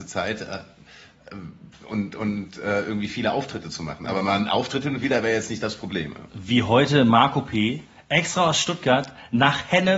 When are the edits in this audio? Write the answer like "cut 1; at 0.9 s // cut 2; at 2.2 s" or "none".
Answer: none